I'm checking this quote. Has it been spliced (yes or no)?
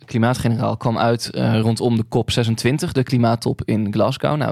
no